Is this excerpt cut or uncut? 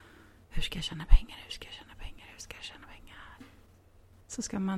uncut